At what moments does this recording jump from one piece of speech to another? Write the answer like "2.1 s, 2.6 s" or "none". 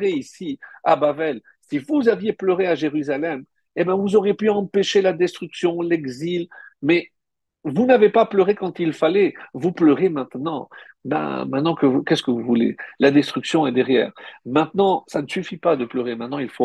none